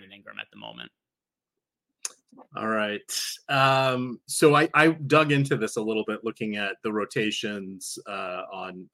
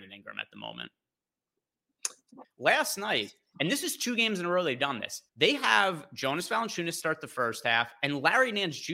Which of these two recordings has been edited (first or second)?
second